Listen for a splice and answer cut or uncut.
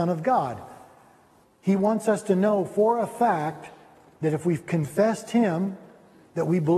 cut